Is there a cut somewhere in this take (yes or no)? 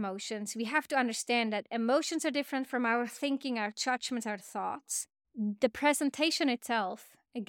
yes